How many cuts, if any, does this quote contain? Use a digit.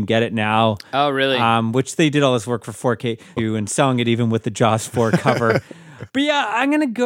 2